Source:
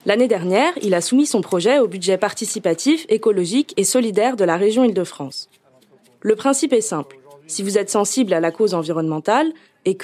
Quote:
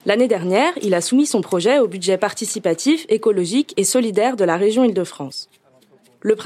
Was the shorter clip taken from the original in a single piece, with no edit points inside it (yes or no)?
yes